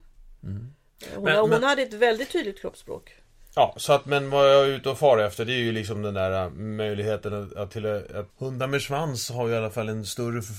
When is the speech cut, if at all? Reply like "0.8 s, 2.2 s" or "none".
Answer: 8.3 s